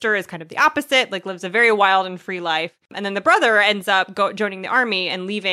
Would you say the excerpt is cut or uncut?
uncut